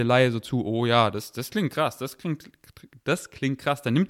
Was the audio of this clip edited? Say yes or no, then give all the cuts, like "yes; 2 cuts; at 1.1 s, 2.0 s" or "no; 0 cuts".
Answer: no; 0 cuts